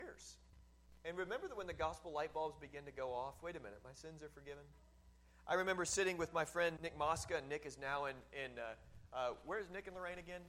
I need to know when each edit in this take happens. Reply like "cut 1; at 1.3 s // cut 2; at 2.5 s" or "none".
cut 1; at 6.8 s